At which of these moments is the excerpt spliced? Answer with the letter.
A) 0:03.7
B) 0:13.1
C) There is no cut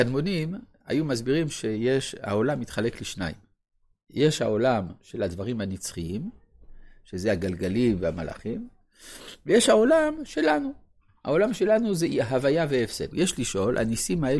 B